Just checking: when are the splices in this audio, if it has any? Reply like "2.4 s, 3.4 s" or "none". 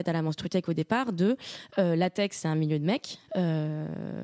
3.3 s